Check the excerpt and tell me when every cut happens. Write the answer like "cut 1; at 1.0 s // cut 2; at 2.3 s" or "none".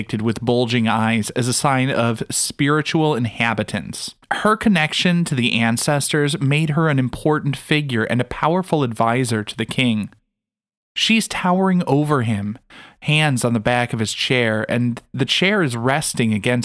cut 1; at 4.2 s